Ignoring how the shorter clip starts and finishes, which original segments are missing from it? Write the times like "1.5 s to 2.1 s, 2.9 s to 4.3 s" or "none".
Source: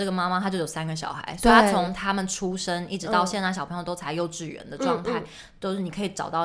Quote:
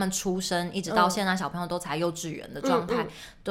none